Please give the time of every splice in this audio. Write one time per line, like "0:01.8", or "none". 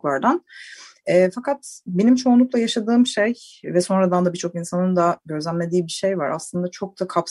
none